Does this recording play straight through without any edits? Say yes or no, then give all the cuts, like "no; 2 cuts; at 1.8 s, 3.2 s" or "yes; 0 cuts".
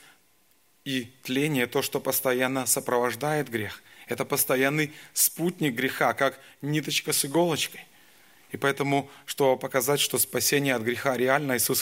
yes; 0 cuts